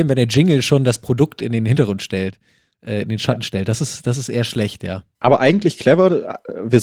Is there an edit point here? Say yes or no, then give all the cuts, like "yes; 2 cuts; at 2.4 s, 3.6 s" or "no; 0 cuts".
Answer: no; 0 cuts